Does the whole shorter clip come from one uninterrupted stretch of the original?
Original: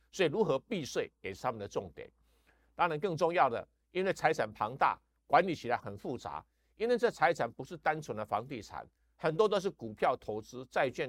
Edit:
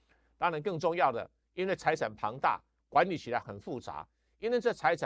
yes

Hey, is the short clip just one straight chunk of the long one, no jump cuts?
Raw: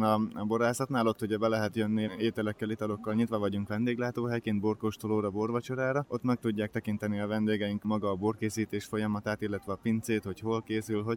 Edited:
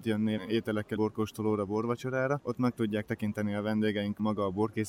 no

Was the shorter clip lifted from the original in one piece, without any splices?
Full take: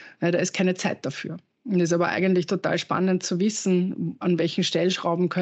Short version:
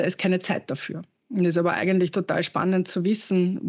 yes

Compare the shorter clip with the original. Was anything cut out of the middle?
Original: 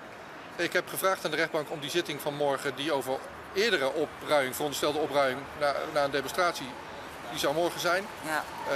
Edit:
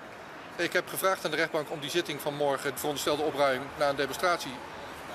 yes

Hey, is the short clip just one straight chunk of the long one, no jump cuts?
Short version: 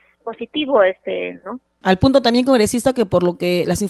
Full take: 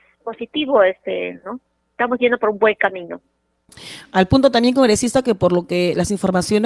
no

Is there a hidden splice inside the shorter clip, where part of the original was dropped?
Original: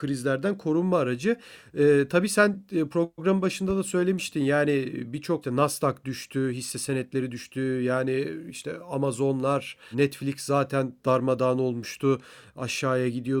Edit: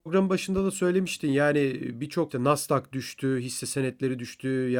no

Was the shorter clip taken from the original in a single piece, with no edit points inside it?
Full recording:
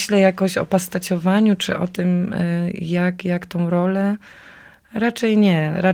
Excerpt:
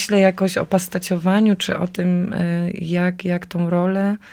yes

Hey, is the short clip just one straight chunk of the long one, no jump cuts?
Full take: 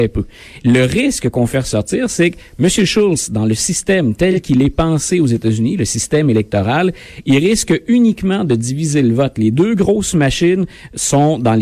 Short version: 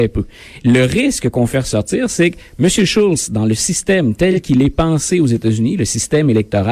yes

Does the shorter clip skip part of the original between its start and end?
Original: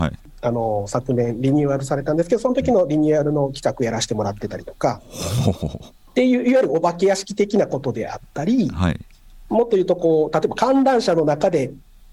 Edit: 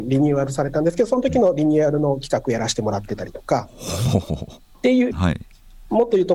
yes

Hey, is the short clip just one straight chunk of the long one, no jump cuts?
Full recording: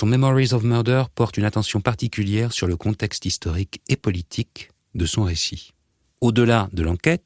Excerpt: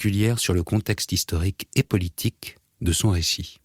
yes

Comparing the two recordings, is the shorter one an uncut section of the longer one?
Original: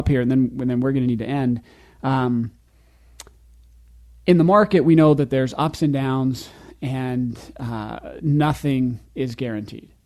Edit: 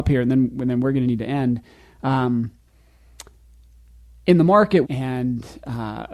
no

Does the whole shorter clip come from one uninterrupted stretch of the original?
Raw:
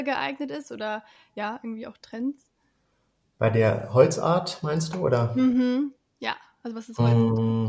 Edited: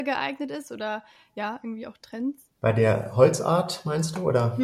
no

